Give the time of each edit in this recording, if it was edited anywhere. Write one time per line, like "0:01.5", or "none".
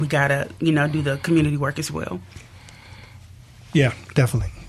none